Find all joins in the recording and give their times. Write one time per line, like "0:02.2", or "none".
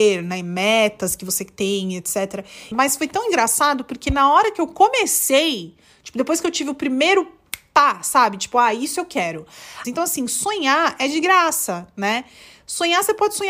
0:02.7
0:09.8